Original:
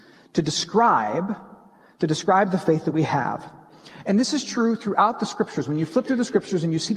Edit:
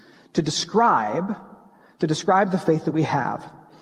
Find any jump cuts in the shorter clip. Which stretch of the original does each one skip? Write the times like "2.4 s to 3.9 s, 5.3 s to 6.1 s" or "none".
none